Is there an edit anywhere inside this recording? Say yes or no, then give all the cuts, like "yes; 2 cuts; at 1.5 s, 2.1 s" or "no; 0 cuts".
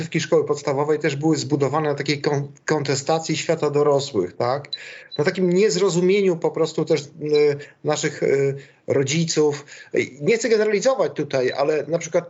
no; 0 cuts